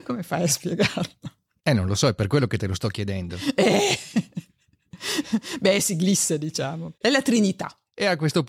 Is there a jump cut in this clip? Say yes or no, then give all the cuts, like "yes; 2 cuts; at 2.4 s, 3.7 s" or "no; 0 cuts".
no; 0 cuts